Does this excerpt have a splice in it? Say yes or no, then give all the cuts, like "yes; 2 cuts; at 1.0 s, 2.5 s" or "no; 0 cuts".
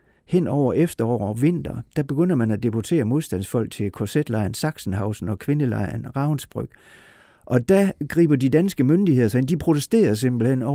no; 0 cuts